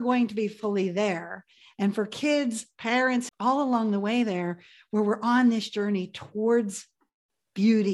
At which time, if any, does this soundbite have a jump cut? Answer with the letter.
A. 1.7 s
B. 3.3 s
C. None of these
B